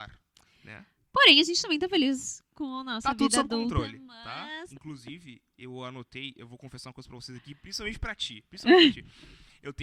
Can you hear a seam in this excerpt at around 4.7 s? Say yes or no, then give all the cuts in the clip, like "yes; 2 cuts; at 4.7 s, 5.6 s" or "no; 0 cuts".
yes; 1 cut; at 4.7 s